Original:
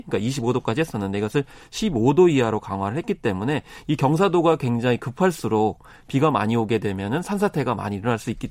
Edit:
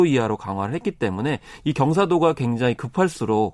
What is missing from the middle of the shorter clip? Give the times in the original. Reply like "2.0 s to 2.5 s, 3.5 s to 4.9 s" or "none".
none